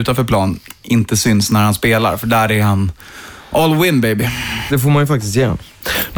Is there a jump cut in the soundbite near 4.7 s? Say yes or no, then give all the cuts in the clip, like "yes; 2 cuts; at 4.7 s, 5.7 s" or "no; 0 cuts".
yes; 1 cut; at 4.7 s